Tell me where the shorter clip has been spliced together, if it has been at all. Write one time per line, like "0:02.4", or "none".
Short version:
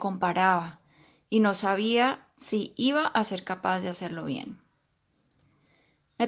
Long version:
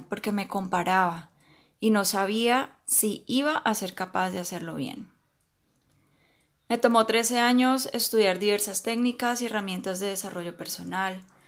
none